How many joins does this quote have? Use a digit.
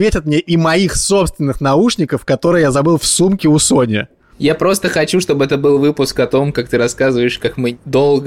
0